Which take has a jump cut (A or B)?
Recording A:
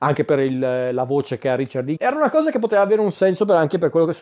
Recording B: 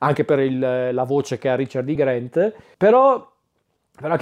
A